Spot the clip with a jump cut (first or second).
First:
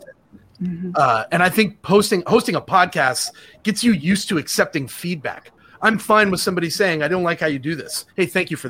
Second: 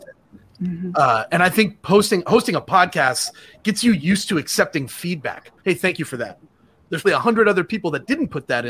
second